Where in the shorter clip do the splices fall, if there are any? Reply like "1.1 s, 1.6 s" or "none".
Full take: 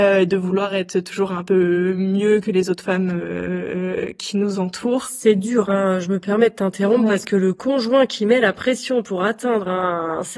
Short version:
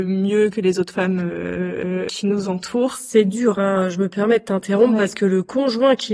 2.1 s